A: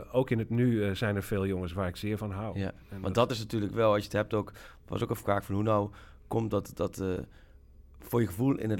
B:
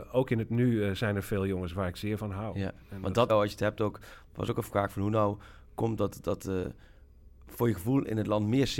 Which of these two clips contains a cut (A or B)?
B